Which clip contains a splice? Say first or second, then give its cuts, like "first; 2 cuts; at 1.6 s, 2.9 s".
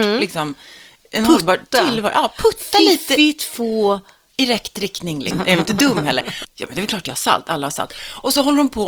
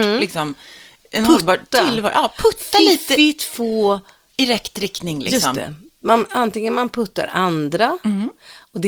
first; 2 cuts; at 5.3 s, 6.4 s